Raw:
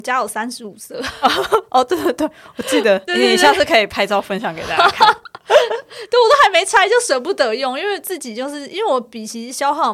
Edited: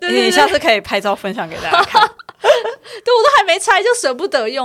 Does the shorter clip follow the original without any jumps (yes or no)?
yes